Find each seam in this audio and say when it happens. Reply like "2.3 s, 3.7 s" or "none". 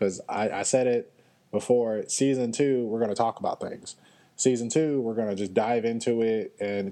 none